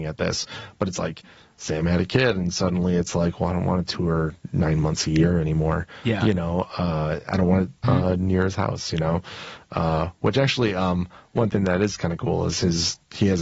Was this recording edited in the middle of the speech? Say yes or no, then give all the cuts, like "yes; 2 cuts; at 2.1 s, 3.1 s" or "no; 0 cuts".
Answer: yes; 1 cut; at 7.8 s